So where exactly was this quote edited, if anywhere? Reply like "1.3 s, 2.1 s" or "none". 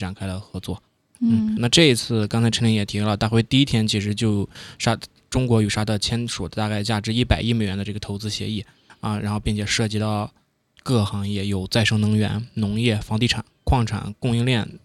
1.6 s